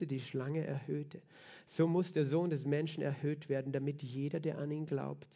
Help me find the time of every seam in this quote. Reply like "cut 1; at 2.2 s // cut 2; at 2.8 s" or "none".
none